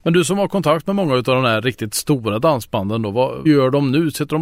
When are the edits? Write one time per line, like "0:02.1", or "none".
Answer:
0:03.5